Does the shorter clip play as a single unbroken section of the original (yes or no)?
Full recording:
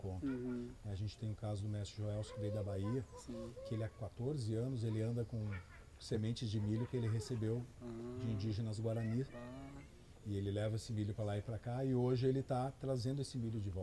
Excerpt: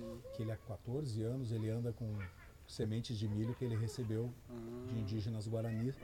yes